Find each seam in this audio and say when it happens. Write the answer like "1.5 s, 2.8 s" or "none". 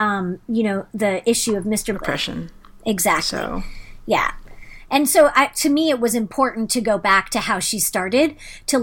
1.9 s